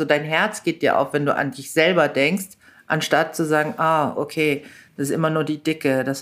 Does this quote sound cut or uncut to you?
uncut